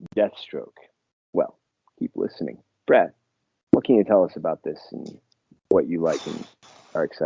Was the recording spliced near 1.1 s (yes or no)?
yes